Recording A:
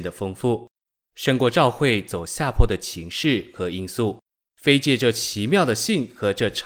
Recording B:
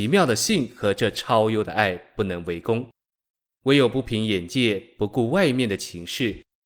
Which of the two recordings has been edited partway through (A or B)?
A